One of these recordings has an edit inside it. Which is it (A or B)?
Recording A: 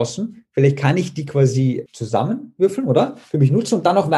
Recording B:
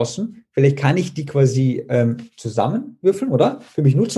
A